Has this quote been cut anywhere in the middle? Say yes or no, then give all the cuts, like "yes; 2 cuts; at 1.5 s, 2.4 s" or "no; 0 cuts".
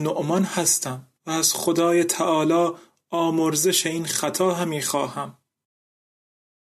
yes; 1 cut; at 1.2 s